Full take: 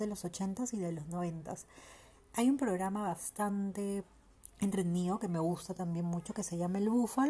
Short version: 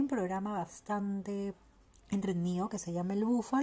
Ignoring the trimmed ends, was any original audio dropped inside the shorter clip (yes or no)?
yes